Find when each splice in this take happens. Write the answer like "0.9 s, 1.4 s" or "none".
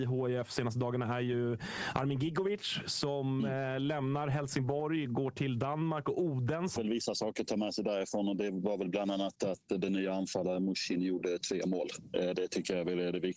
6.8 s